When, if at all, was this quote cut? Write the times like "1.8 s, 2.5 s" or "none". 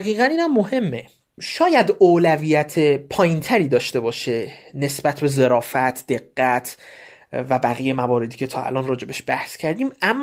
none